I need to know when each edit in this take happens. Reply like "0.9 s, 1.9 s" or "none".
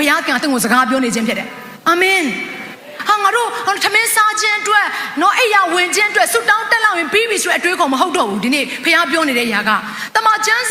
1.8 s